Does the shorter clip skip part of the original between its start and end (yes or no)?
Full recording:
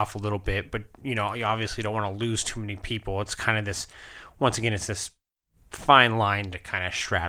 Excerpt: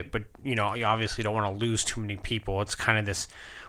no